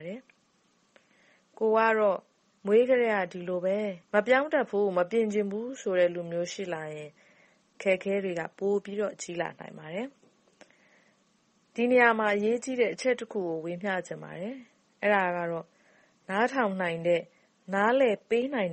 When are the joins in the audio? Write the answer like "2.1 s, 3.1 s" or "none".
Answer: 4.0 s

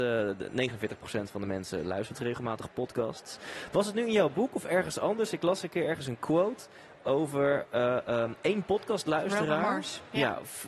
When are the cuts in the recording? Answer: none

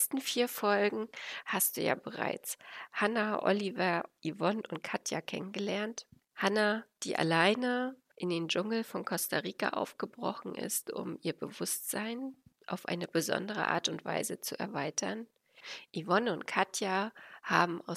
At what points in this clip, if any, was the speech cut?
none

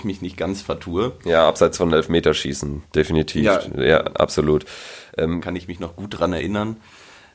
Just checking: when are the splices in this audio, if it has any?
5.4 s

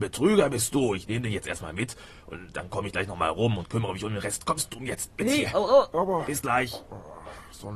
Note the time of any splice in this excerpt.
5.9 s

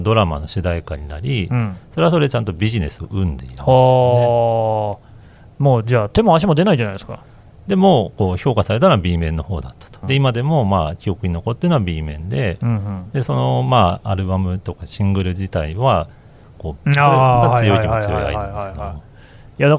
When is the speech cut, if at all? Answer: 10.0 s, 16.8 s

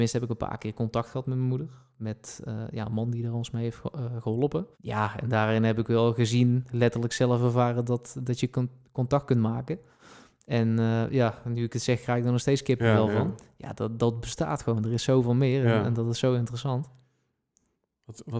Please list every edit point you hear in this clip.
4.7 s

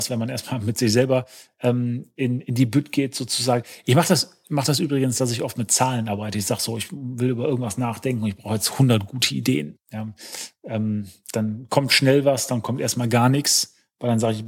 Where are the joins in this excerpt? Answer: none

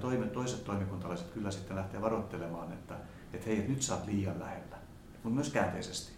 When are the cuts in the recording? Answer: 5.1 s

